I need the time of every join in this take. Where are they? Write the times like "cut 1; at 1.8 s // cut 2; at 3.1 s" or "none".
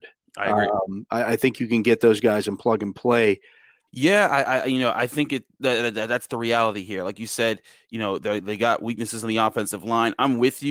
cut 1; at 3.9 s